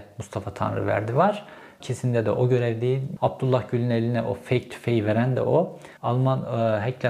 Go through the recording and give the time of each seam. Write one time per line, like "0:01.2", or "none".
0:01.8
0:03.2
0:06.0